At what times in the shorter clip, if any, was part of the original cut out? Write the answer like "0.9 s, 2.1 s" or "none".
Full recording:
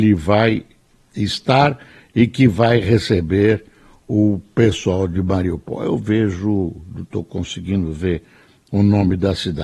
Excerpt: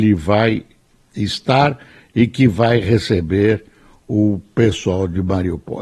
none